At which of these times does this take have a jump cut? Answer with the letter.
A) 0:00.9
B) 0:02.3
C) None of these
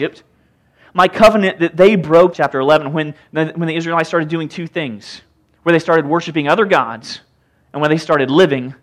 B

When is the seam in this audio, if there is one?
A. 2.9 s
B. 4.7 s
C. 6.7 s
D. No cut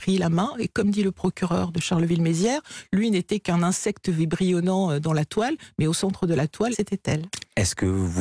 C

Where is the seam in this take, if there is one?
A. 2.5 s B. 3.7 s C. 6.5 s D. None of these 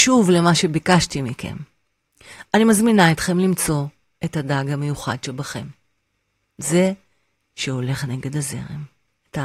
D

